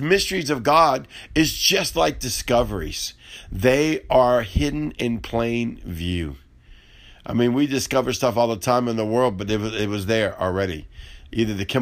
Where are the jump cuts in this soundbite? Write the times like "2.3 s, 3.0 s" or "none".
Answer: none